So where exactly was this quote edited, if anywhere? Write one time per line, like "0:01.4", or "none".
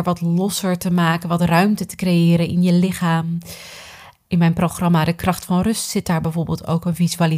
0:04.2